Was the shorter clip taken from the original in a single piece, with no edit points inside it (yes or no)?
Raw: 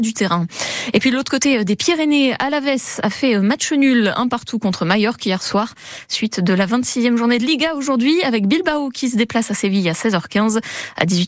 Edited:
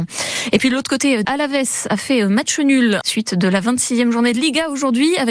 no